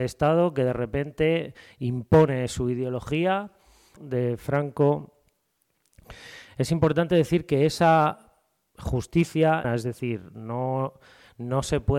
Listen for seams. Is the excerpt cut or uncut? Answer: cut